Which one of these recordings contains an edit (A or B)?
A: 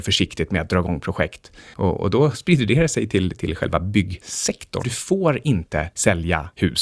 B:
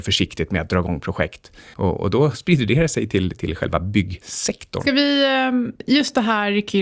A